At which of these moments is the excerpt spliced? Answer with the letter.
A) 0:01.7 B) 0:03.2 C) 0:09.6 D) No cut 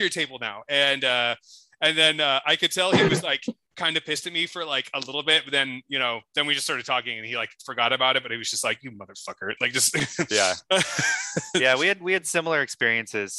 D